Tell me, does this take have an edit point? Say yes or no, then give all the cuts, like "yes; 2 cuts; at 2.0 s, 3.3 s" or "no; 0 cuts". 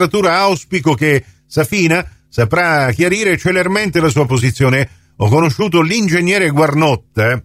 no; 0 cuts